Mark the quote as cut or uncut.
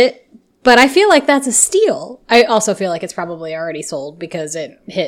uncut